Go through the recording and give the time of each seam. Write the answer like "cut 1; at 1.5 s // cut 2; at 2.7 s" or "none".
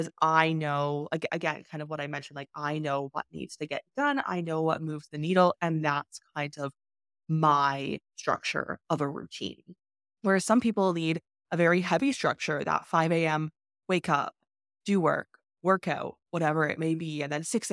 cut 1; at 5.5 s

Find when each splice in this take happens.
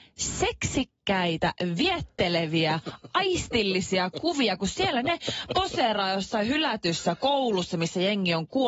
none

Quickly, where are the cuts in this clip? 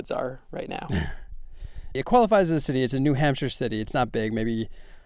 cut 1; at 1.9 s

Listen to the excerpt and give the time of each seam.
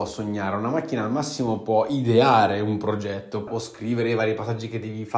cut 1; at 3.5 s

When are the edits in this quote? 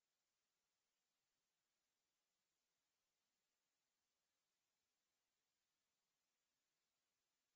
none

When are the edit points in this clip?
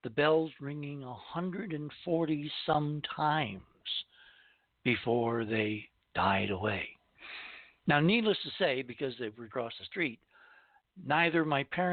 cut 1; at 9.5 s

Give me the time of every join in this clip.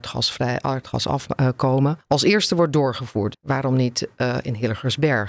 cut 1; at 2.0 s // cut 2; at 3.3 s

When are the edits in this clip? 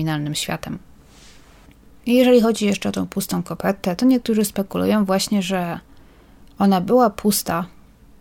none

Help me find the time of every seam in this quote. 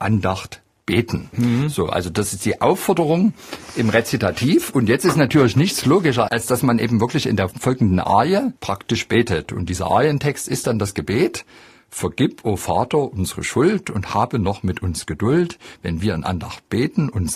none

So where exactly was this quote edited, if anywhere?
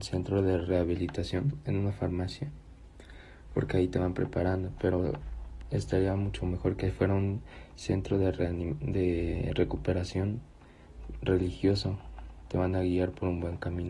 none

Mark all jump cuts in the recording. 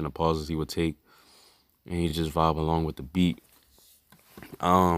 none

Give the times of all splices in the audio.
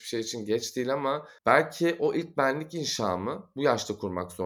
cut 1; at 1.4 s

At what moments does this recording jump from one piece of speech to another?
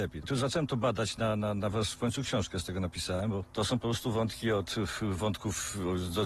cut 1; at 1.7 s

